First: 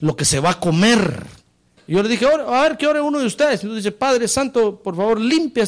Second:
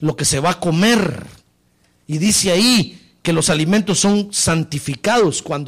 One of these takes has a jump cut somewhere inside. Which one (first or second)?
first